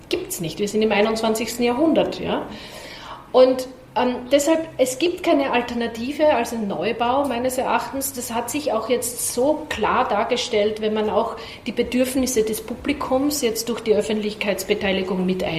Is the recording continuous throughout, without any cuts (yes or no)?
yes